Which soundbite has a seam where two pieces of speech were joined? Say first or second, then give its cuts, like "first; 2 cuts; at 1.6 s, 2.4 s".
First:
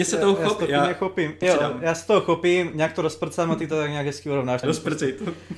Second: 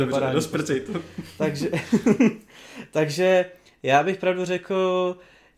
first; 2 cuts; at 1.4 s, 4.6 s